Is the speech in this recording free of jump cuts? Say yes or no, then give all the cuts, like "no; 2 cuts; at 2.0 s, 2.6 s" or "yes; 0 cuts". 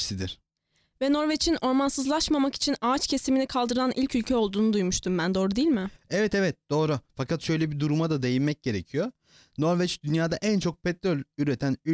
no; 1 cut; at 7.1 s